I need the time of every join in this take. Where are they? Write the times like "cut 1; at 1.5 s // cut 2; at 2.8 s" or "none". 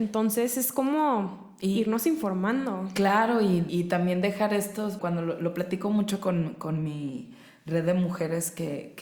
cut 1; at 3.7 s // cut 2; at 5.0 s

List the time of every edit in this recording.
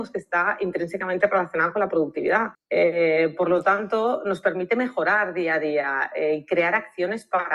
cut 1; at 2.5 s

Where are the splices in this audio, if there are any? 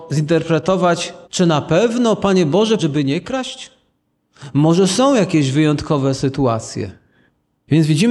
cut 1; at 1.2 s // cut 2; at 2.8 s

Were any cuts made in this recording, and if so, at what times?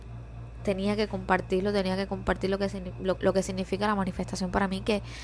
cut 1; at 3.2 s

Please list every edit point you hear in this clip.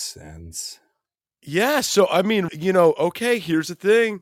cut 1; at 2.5 s

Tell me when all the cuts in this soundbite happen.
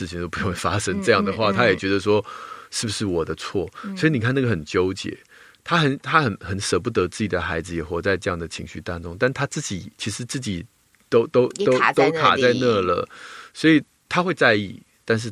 cut 1; at 9.9 s

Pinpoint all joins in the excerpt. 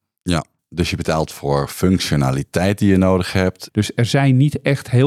cut 1; at 3.7 s

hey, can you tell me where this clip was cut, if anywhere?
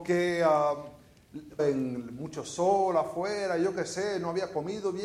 cut 1; at 1.6 s

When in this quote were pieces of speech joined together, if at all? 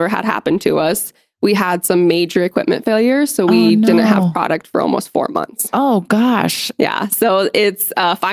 none

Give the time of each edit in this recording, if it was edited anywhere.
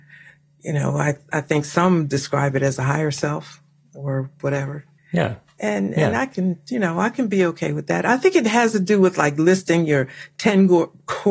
cut 1; at 5.0 s

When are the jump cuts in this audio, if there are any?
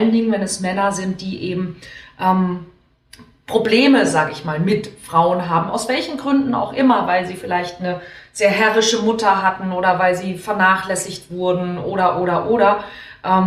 none

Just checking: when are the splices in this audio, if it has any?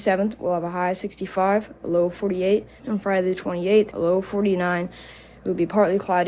cut 1; at 2.8 s // cut 2; at 3.9 s

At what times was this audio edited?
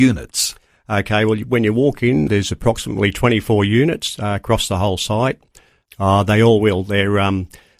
cut 1; at 2.3 s // cut 2; at 5.9 s

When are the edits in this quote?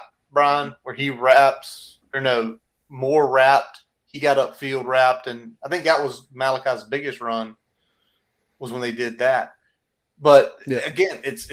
none

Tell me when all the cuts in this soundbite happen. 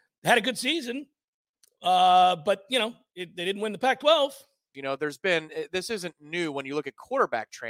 cut 1; at 4.7 s

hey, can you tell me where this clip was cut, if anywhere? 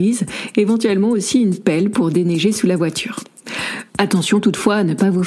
cut 1; at 3.9 s

